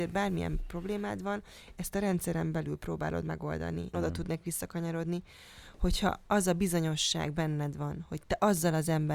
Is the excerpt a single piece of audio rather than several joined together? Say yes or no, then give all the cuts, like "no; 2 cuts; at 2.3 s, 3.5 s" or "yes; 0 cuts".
no; 1 cut; at 3.9 s